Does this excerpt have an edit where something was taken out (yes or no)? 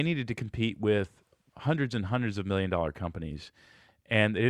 no